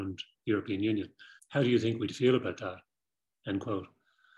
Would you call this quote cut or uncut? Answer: cut